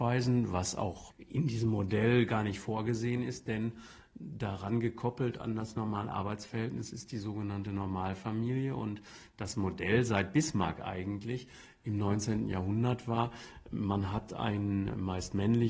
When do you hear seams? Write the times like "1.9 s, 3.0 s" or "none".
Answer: none